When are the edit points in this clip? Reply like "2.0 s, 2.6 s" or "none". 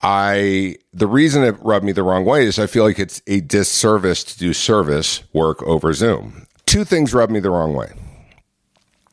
6.5 s